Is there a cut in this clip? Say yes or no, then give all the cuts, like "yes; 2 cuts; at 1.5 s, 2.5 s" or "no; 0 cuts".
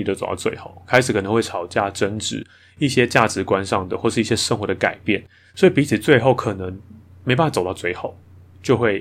no; 0 cuts